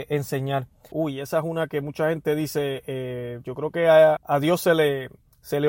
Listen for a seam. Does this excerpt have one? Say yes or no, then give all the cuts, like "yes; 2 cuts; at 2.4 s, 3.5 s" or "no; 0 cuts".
yes; 2 cuts; at 0.9 s, 4.2 s